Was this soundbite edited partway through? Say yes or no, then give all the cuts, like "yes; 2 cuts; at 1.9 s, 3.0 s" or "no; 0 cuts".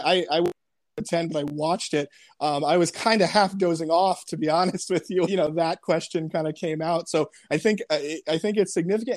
yes; 1 cut; at 5.3 s